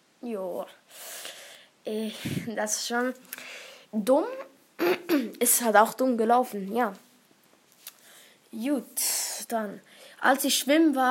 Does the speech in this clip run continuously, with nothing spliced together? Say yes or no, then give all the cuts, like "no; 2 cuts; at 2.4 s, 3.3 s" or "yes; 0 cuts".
yes; 0 cuts